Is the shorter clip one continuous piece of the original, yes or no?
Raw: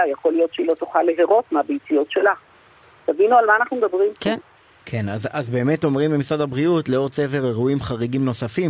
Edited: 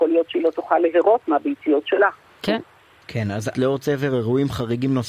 no